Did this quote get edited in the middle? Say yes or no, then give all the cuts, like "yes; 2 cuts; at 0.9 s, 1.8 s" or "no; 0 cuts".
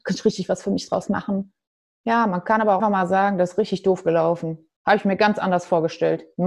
yes; 1 cut; at 2.8 s